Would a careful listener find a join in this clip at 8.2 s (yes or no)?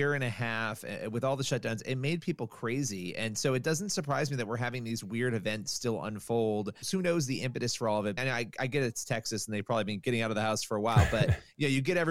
yes